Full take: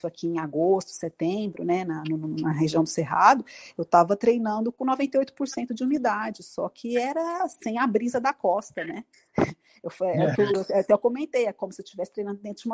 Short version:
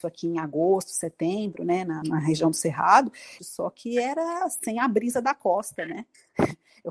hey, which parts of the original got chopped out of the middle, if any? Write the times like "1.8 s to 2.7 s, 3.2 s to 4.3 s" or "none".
2.0 s to 2.3 s, 3.7 s to 6.4 s